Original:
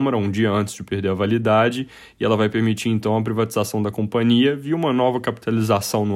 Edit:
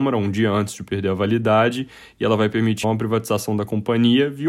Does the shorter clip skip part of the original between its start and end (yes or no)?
yes